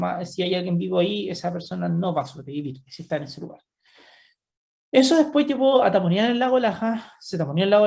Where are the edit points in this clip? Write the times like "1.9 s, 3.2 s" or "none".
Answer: none